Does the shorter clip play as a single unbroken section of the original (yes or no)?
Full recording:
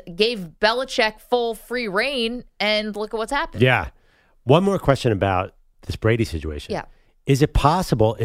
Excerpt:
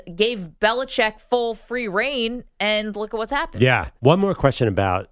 no